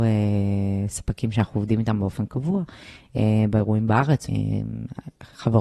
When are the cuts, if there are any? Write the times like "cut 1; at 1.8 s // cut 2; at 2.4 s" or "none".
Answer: cut 1; at 4.3 s